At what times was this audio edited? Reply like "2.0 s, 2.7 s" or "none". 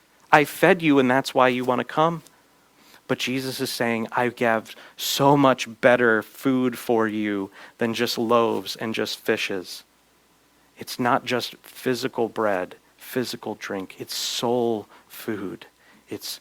none